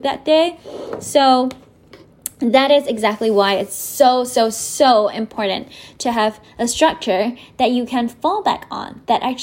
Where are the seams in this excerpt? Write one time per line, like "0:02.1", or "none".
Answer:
none